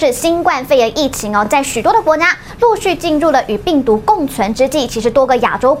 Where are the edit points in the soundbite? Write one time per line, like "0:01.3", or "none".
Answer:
none